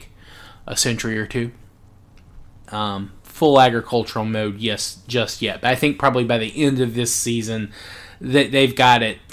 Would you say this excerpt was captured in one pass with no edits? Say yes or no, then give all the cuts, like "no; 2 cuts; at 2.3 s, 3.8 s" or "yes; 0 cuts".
no; 1 cut; at 2.7 s